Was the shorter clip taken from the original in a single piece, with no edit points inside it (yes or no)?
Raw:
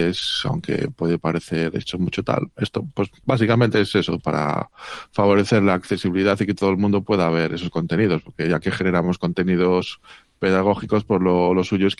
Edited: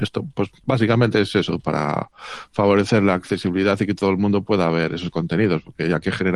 yes